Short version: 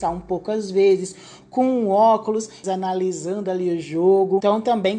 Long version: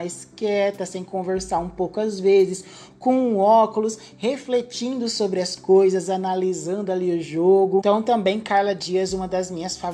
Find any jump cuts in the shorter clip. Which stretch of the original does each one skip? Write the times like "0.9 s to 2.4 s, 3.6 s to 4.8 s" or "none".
4.1 s to 6.1 s